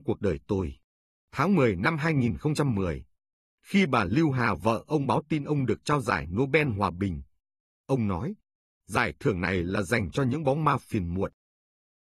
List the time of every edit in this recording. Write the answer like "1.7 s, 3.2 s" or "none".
none